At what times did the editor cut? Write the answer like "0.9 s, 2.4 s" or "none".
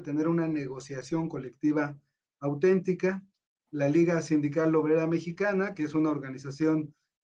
none